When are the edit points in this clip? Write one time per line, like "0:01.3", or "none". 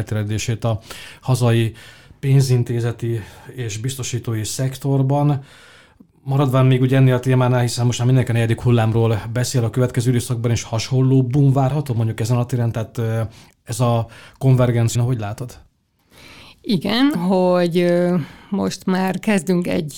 0:14.9
0:17.1